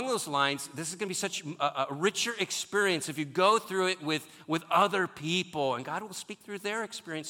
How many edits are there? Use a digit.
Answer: 0